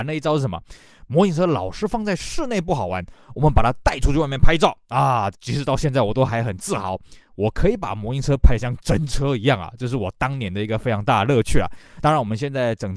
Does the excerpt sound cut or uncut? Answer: cut